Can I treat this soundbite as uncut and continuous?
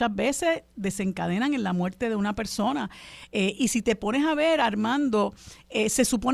yes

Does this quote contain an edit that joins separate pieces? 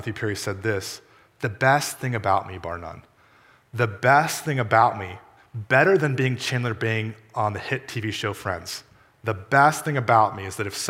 no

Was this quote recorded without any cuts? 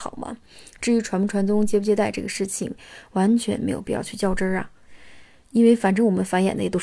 yes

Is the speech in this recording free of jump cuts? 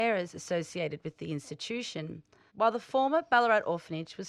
no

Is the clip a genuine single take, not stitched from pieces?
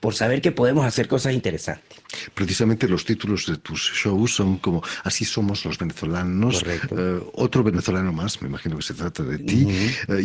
yes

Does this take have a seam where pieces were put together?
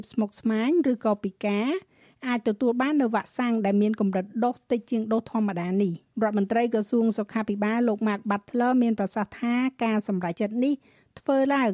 yes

